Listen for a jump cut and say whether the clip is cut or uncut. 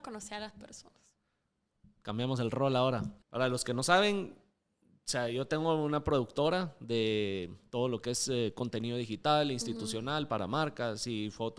cut